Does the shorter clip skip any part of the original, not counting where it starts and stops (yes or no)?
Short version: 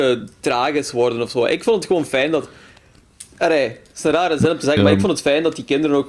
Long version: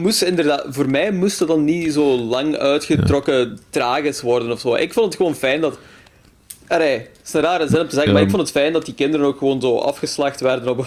no